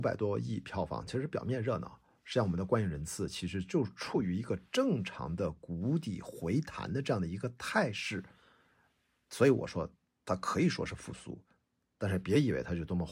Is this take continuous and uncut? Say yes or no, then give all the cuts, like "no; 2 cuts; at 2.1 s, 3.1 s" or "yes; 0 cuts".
yes; 0 cuts